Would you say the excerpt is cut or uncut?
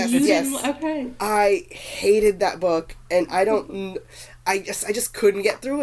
uncut